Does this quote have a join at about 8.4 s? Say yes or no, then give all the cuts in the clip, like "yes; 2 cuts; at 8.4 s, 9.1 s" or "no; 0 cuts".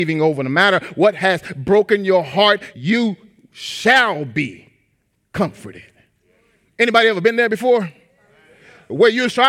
no; 1 cut; at 2.7 s